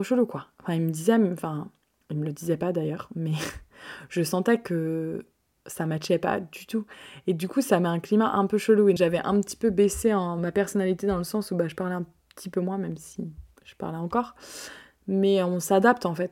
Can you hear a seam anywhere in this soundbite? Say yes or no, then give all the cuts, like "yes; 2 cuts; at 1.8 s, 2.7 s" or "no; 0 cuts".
yes; 1 cut; at 9.0 s